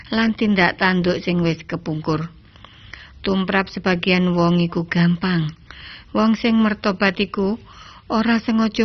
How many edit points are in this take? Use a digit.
1